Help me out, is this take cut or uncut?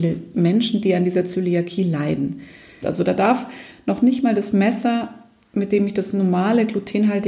cut